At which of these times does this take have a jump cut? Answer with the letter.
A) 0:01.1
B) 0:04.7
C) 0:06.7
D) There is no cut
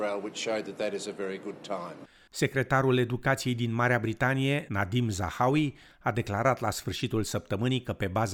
D